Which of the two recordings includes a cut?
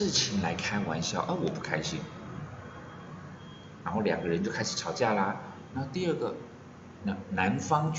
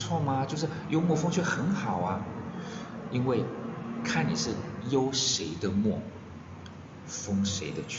first; 2 cuts; at 5.7 s, 7.0 s

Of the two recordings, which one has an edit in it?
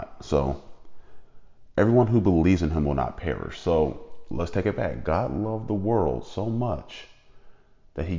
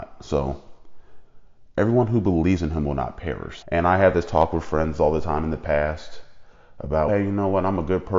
second; 2 cuts; at 3.6 s, 7.1 s

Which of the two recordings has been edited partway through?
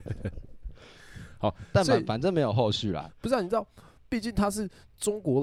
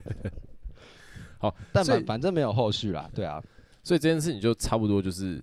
first; 1 cut; at 3.1 s

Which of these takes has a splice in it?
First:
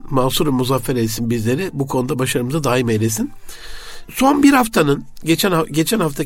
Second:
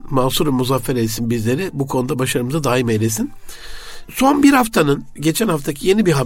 second; 1 cut; at 5.2 s

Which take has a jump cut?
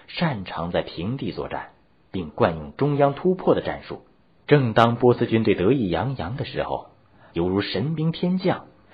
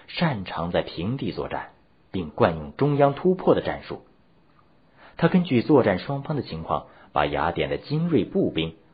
first; 2 cuts; at 4.4 s, 7.3 s

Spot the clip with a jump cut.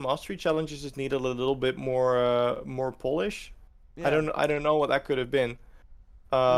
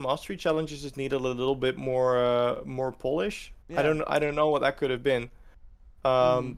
second; 1 cut; at 3.6 s

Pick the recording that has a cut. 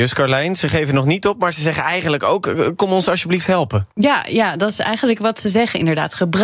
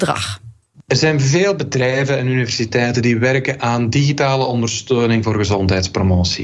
first; 1 cut; at 3.9 s

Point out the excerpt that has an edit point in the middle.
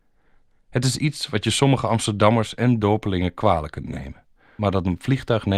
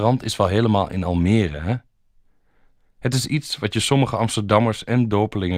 first; 1 cut; at 4.6 s

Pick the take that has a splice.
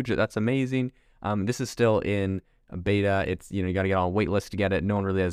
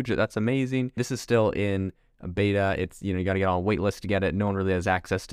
second; 1 cut; at 1.0 s

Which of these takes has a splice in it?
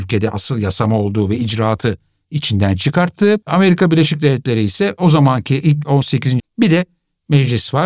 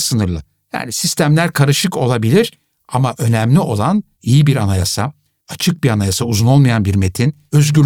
first; 2 cuts; at 3.4 s, 6.4 s

